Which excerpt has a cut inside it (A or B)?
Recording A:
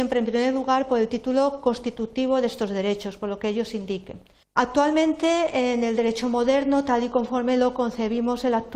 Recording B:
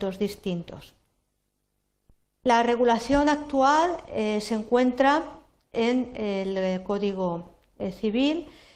A